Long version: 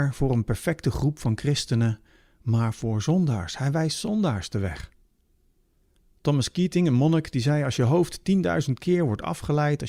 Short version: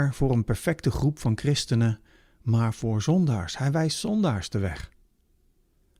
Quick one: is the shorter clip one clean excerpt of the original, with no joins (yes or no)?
yes